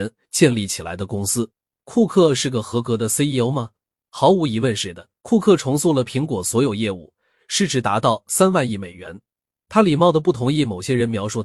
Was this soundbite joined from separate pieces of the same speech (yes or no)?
yes